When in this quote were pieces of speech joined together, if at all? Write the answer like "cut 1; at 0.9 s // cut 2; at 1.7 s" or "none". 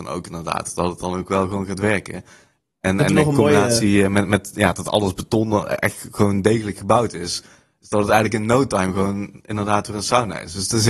none